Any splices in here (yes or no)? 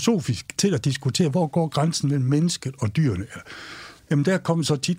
yes